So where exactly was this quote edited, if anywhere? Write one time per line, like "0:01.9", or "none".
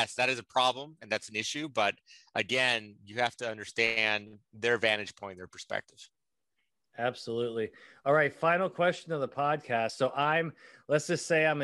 none